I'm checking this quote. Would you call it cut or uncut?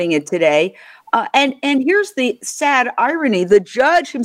uncut